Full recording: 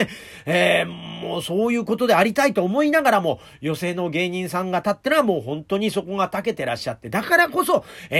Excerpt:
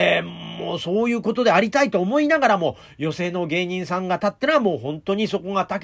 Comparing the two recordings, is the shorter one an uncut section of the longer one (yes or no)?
yes